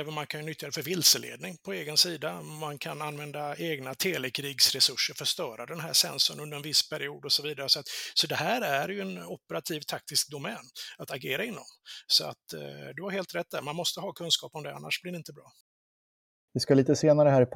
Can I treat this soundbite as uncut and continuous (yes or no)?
yes